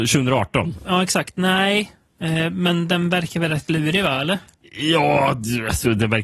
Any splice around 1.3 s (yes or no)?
no